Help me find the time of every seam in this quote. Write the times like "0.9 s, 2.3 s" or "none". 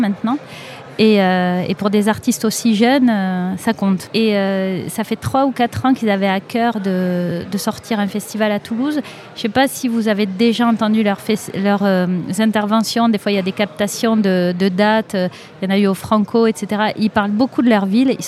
none